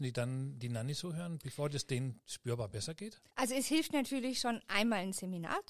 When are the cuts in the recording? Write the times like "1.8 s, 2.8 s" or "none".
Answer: 3.3 s